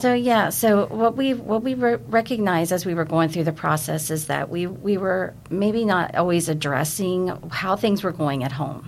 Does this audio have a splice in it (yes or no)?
no